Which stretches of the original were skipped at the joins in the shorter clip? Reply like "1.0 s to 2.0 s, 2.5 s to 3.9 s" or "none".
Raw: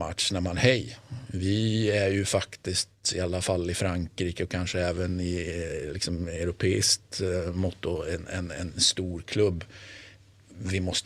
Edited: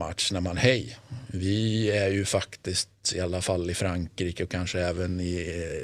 none